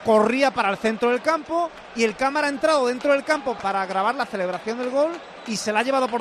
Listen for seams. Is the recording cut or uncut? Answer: cut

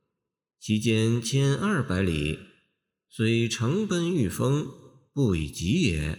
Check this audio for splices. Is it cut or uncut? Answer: uncut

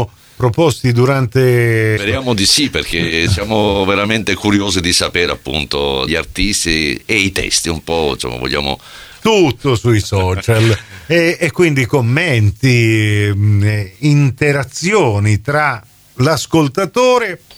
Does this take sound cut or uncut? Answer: cut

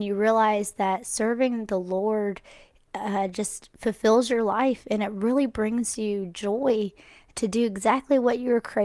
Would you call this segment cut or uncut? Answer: uncut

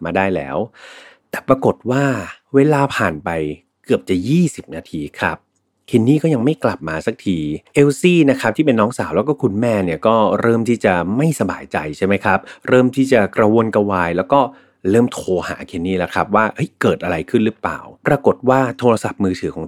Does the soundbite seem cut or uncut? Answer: cut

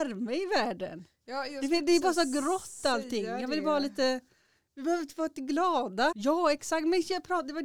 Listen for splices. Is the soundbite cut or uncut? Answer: cut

